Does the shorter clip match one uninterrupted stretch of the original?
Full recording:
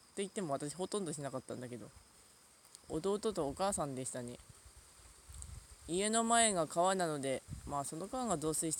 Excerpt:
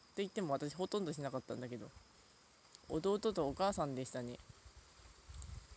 yes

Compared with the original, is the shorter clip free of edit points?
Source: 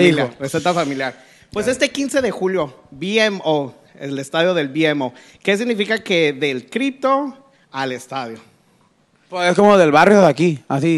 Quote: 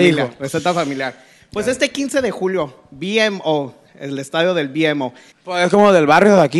no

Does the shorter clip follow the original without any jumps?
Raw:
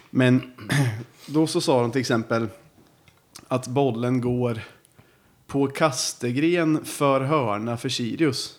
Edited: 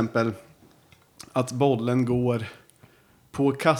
yes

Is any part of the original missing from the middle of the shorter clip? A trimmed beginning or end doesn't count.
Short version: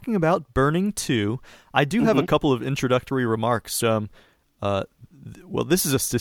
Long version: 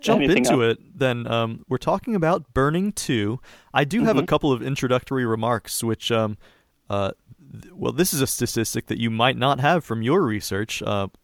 yes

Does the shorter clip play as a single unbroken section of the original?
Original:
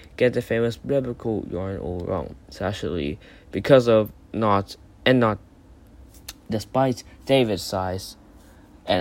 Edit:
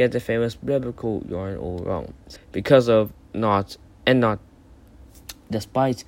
no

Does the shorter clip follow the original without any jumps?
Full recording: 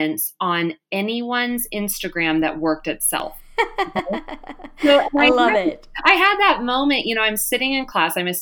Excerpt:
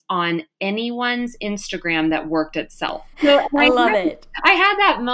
no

